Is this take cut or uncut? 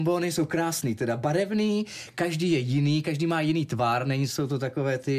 uncut